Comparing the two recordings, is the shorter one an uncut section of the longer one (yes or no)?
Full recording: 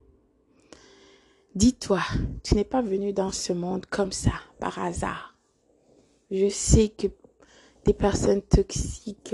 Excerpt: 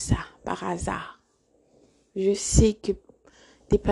yes